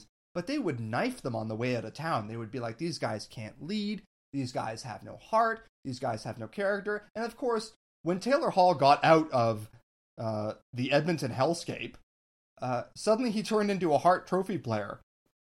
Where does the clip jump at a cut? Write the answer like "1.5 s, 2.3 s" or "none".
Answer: none